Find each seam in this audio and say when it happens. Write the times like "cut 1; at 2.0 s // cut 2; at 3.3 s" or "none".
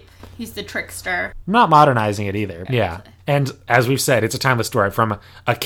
cut 1; at 1.4 s // cut 2; at 2.7 s